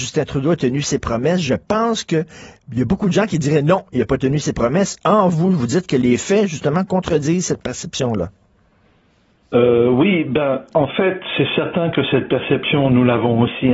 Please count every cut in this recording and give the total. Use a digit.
0